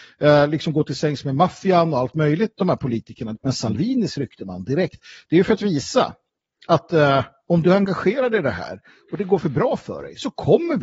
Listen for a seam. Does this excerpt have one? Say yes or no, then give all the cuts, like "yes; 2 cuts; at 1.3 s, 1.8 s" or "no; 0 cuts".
yes; 1 cut; at 3.4 s